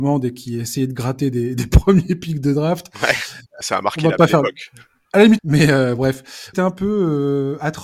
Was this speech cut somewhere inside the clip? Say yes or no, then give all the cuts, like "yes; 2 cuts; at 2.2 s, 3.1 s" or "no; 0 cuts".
yes; 3 cuts; at 3.6 s, 5.4 s, 6.5 s